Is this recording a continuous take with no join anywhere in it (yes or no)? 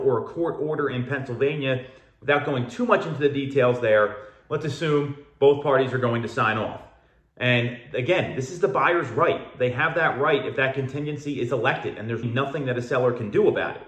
no